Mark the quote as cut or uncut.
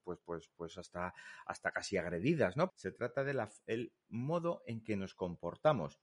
cut